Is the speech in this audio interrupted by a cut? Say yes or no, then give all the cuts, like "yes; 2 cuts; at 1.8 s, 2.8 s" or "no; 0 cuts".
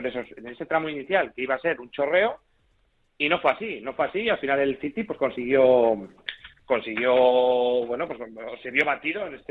no; 0 cuts